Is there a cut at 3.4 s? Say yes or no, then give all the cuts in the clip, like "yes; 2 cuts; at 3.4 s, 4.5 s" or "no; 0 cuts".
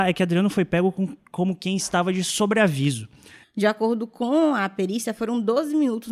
yes; 1 cut; at 3.4 s